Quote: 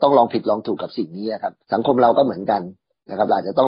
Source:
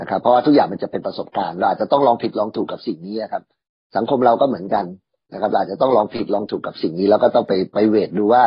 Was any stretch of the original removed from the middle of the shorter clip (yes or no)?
yes